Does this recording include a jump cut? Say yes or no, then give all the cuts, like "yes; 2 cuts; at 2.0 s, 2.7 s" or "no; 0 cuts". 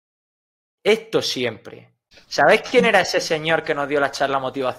yes; 1 cut; at 2.1 s